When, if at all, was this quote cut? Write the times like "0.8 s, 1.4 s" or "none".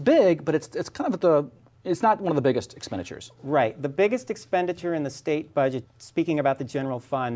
5.8 s